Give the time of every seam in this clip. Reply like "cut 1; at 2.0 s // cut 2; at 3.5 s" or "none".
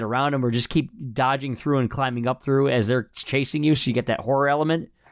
none